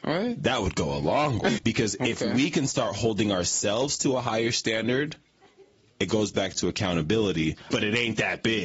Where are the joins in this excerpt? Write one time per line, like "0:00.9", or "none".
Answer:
0:01.6
0:07.7